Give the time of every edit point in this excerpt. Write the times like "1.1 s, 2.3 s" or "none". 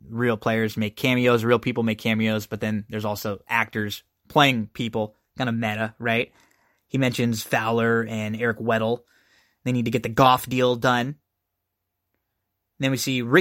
none